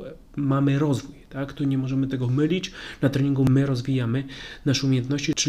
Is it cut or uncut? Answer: uncut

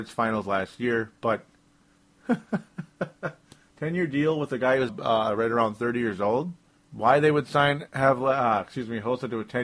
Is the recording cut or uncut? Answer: cut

